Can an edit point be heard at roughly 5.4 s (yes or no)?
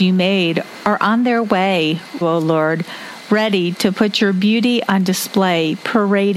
no